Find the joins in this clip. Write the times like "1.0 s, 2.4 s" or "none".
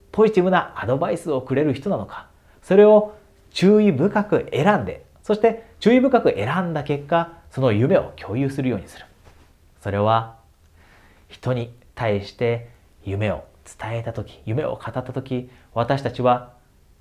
9.7 s